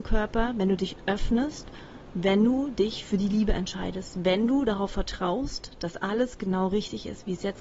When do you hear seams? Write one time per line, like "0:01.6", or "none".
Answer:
none

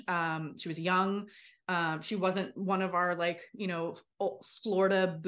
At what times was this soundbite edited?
none

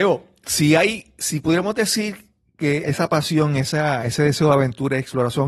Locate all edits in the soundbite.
0:02.8

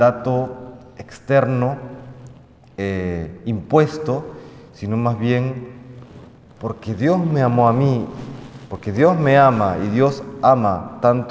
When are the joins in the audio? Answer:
none

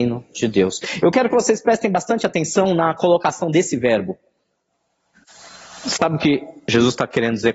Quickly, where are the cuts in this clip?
0:05.1

